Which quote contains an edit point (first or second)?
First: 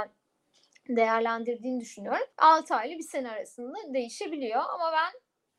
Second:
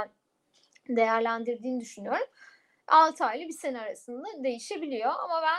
first